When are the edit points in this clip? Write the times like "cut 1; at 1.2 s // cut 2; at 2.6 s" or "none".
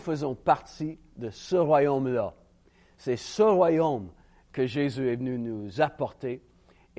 none